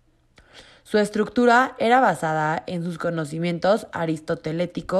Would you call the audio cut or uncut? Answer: uncut